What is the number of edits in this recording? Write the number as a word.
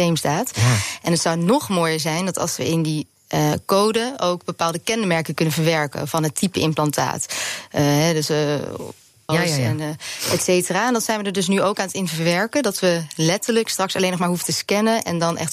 one